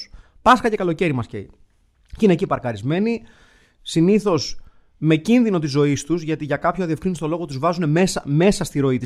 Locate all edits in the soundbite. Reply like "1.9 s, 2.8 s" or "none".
none